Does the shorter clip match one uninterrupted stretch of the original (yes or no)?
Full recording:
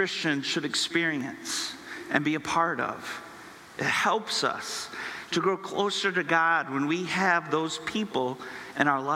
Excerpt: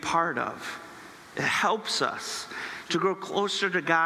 yes